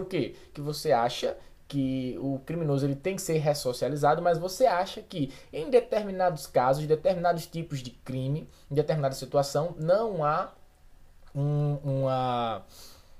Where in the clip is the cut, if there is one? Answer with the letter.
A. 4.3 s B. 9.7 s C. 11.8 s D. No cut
D